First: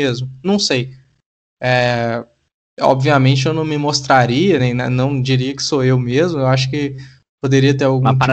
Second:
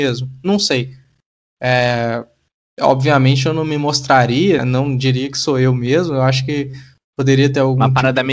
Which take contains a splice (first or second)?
second